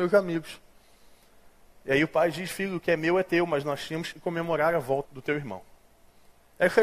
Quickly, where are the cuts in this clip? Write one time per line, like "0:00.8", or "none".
0:05.1